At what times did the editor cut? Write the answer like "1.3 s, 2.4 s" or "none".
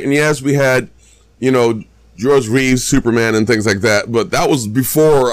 none